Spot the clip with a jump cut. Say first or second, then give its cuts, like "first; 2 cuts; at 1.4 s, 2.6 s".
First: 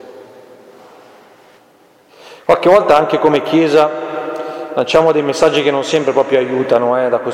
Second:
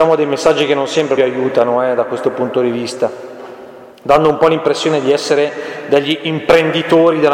second; 2 cuts; at 1.2 s, 3.9 s